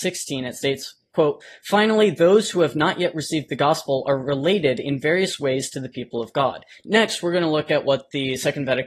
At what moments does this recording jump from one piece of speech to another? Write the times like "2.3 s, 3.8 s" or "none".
6.8 s